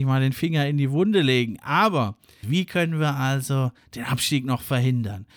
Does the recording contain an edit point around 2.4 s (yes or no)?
yes